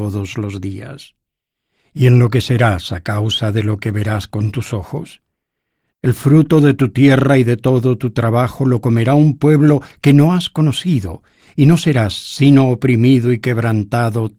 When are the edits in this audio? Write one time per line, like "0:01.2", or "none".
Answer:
0:05.9

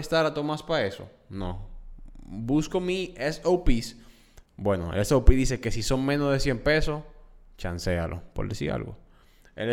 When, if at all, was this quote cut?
0:04.5

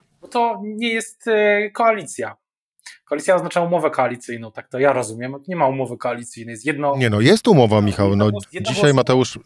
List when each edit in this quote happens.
0:08.4

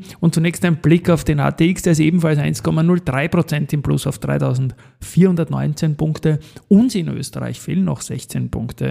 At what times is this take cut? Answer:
none

